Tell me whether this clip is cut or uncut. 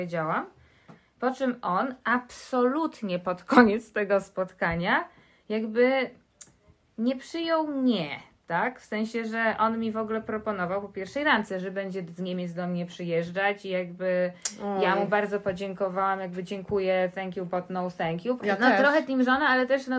cut